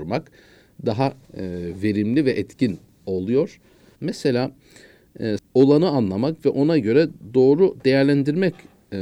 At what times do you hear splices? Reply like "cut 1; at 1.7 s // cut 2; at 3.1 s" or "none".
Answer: cut 1; at 4.0 s // cut 2; at 5.4 s